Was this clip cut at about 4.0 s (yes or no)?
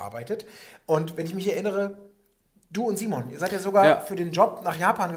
no